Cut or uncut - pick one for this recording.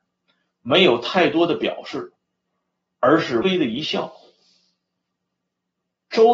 cut